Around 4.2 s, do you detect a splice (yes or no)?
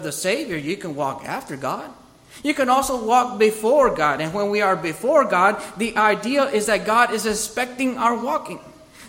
no